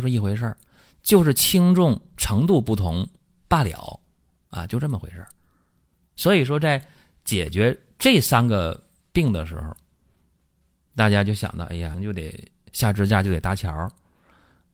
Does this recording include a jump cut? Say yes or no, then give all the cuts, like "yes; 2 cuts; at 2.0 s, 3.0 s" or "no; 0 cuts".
yes; 1 cut; at 11.9 s